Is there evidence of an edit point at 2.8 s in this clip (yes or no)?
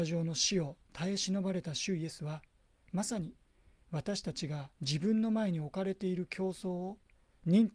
no